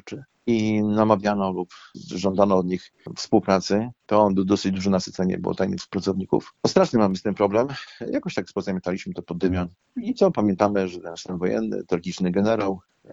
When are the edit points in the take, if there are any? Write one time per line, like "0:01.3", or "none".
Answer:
0:06.6